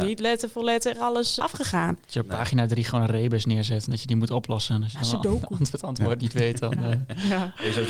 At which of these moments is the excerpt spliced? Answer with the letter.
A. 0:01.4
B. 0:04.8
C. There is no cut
A